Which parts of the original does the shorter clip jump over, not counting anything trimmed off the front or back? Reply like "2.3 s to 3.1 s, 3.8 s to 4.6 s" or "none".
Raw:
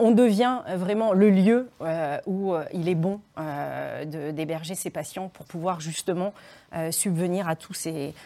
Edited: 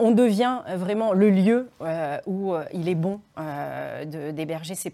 none